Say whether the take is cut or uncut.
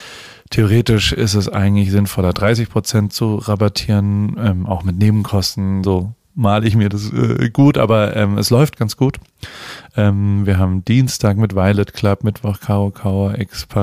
cut